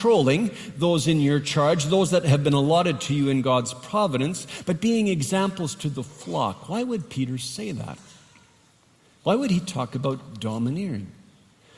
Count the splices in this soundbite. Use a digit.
0